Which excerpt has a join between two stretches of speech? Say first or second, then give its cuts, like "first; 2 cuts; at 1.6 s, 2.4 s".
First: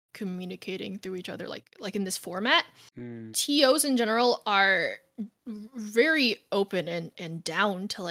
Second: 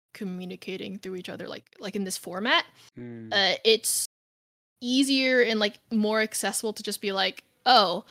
first; 1 cut; at 3.3 s